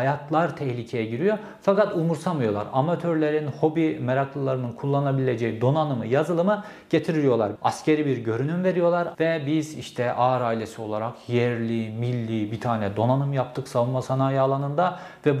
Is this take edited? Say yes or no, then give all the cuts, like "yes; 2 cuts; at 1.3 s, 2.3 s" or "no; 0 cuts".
yes; 2 cuts; at 7.6 s, 9.1 s